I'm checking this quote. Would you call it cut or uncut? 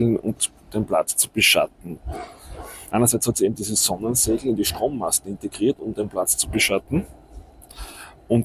uncut